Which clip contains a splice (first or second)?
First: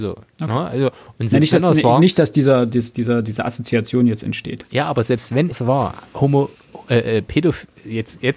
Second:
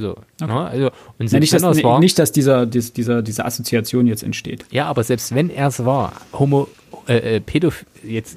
first